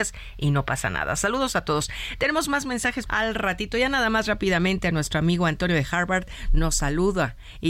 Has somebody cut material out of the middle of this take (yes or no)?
yes